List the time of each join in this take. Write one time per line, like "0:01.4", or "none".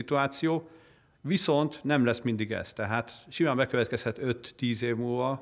none